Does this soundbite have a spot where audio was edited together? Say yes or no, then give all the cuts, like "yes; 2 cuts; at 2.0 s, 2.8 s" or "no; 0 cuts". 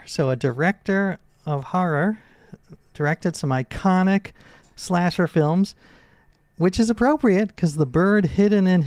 no; 0 cuts